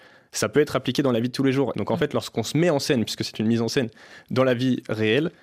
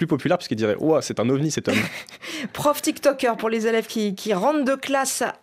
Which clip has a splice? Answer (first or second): first